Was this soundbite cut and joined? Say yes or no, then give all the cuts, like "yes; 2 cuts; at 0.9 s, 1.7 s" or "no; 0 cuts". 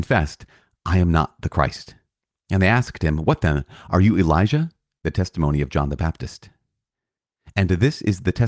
yes; 1 cut; at 5.0 s